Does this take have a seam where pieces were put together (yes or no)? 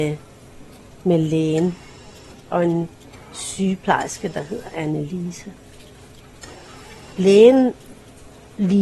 no